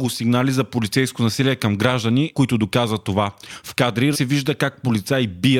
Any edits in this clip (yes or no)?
yes